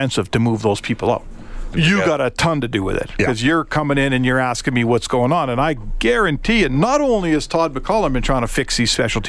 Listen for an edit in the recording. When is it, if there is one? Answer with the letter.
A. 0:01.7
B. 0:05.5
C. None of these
A